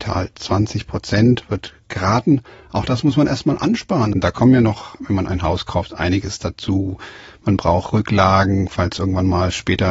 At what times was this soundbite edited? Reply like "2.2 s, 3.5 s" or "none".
4.1 s